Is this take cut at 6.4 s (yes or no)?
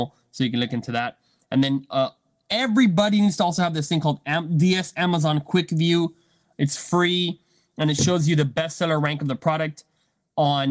no